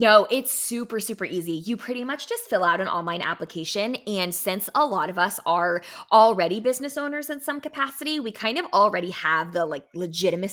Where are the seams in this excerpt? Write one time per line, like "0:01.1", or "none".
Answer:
none